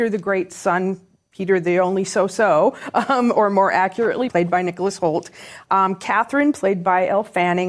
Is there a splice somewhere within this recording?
yes; 1 cut; at 4.3 s

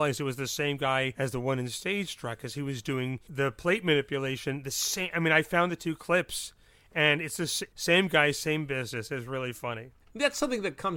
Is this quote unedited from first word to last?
yes; 0 cuts

